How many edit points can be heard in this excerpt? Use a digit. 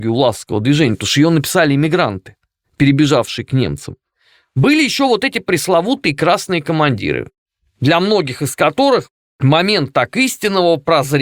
1